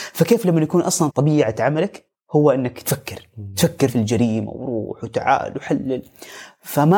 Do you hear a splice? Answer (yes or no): yes